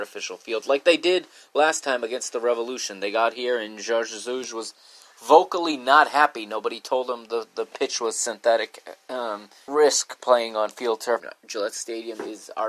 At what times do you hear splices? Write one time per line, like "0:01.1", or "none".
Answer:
0:09.7
0:11.2

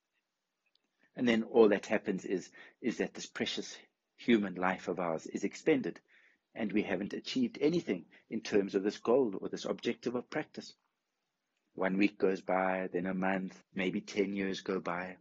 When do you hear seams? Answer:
0:13.6

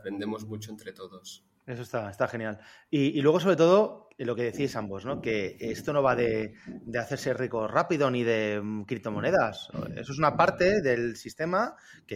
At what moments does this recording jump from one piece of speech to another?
none

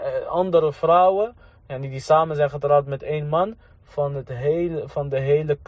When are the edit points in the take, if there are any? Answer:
none

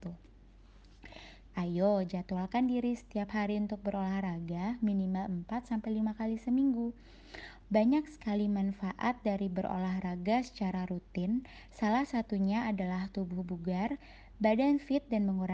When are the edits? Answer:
0:01.5
0:07.6

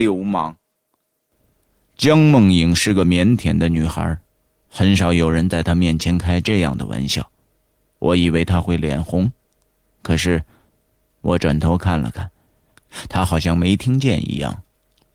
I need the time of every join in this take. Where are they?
none

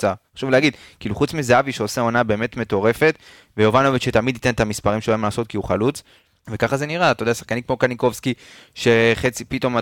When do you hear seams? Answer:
0:06.4

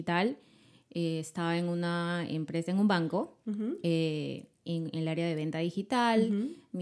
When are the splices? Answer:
none

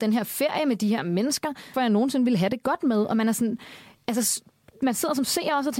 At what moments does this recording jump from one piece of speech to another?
0:01.7

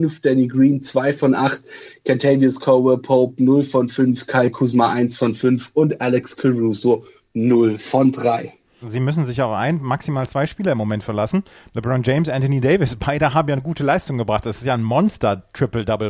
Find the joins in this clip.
0:08.8

